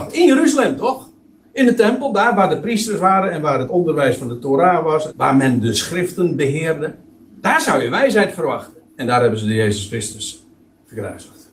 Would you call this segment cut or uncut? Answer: cut